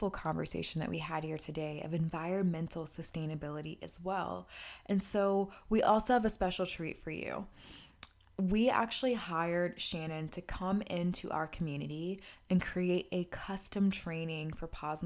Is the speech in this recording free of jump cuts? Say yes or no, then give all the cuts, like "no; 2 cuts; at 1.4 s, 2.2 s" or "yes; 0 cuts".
yes; 0 cuts